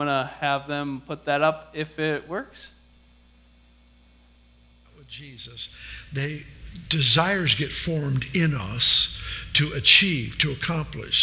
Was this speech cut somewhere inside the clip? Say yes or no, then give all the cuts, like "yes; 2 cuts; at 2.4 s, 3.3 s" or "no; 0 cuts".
no; 0 cuts